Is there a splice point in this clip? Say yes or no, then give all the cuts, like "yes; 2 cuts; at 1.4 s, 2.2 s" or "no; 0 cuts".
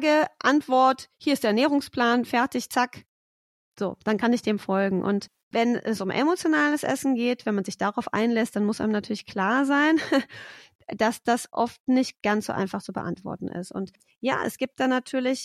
no; 0 cuts